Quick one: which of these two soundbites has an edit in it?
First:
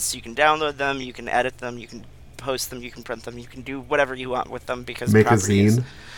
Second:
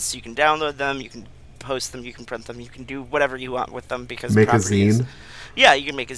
second; 1 cut; at 1.0 s

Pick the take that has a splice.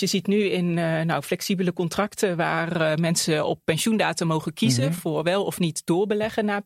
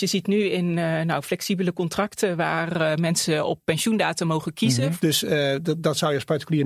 second; 1 cut; at 5.0 s

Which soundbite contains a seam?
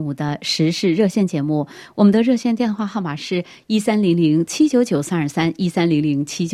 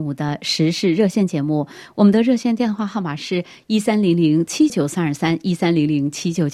second; 1 cut; at 4.7 s

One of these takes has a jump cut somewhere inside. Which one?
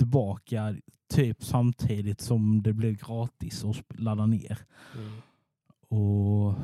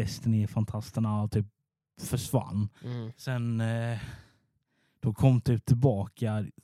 second; 1 cut; at 2.8 s

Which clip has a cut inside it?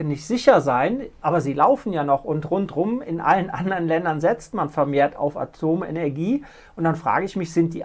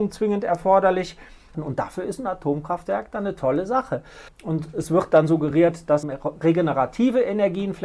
second; 3 cuts; at 1.5 s, 4.3 s, 6.0 s

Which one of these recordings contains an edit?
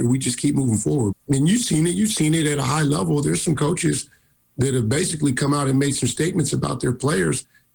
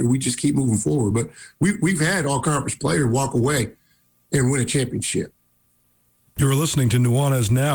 first; 1 cut; at 1.1 s

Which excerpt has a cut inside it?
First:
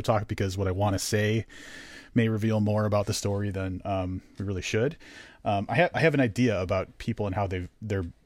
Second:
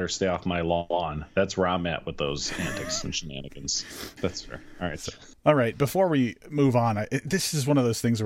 second; 1 cut; at 4.2 s

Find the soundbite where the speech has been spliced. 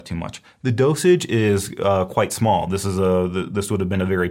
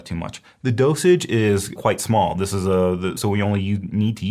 second; 2 cuts; at 1.8 s, 3.2 s

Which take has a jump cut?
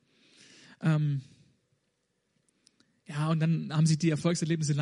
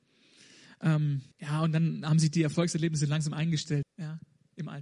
second; 2 cuts; at 1.3 s, 3.8 s

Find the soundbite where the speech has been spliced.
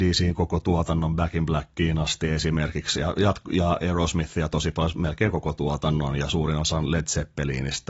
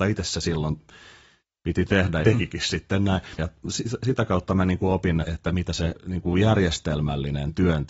second; 3 cuts; at 2.2 s, 3.4 s, 5.2 s

